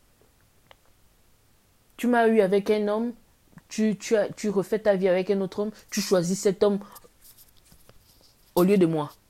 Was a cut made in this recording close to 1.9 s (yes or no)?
no